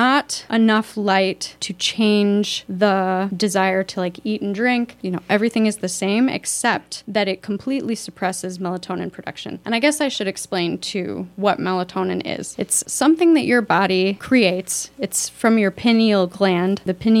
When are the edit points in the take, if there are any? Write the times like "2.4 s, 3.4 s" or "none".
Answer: none